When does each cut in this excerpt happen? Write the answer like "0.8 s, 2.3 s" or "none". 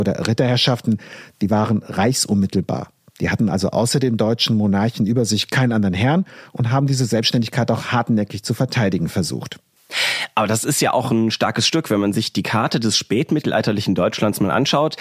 none